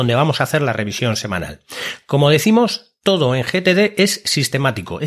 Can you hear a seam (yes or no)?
no